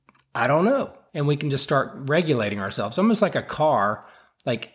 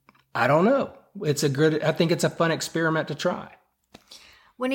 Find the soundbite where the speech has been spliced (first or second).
first